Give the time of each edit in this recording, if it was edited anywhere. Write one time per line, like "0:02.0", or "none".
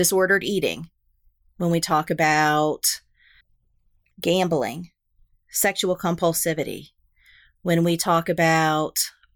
none